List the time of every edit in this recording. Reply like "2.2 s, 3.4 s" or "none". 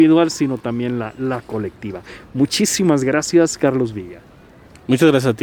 none